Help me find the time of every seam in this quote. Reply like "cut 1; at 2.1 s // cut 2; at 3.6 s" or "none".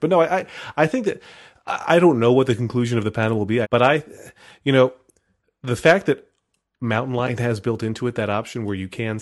cut 1; at 3.6 s